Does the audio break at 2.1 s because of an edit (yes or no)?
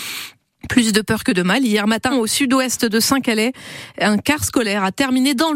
yes